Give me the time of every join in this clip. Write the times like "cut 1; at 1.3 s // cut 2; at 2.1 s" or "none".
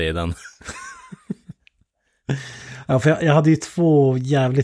none

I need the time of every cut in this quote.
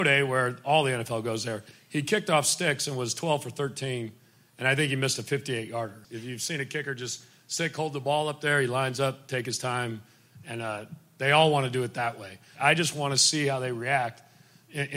cut 1; at 6.0 s // cut 2; at 12.5 s

